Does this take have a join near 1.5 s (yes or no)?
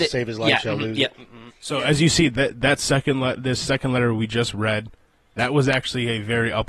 yes